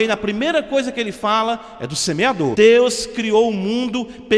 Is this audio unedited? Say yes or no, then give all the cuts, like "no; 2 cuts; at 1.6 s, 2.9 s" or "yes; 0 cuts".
no; 1 cut; at 2.5 s